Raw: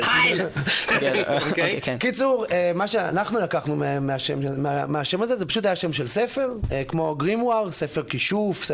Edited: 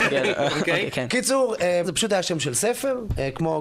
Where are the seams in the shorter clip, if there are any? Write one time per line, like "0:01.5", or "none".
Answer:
0:01.8